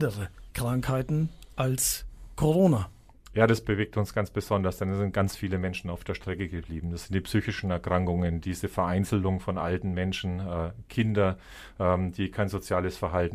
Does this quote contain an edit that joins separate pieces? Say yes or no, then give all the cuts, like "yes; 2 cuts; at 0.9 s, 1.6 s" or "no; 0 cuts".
no; 0 cuts